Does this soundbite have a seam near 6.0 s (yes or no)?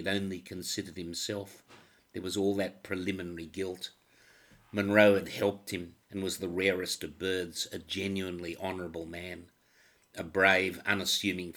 yes